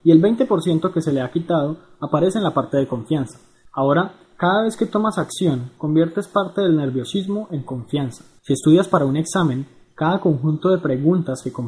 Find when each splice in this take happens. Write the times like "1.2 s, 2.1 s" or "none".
3.7 s, 5.8 s, 8.4 s